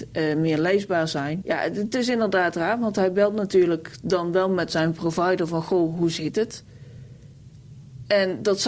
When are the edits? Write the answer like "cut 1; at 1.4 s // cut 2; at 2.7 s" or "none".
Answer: cut 1; at 1.4 s